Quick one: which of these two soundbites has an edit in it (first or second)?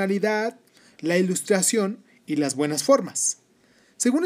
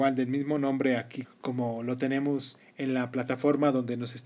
second